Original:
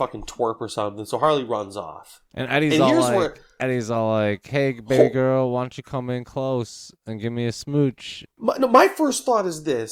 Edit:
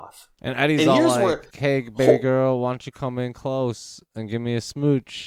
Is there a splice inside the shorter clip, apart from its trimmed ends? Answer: yes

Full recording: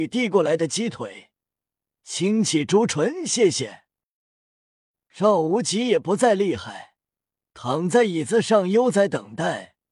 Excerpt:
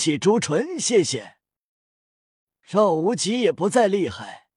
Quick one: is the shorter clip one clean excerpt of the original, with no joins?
yes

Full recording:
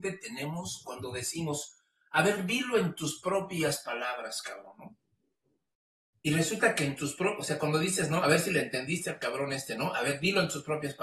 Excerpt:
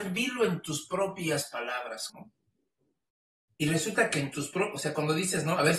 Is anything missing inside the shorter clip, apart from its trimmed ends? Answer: yes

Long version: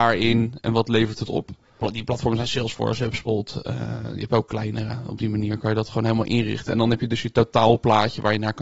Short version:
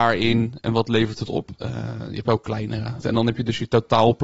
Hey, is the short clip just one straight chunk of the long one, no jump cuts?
no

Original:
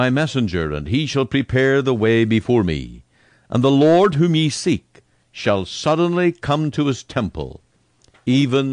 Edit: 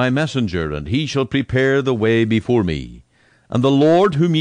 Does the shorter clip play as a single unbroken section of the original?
yes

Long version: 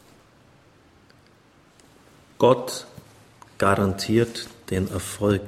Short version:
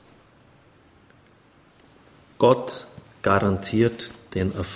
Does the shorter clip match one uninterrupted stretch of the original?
no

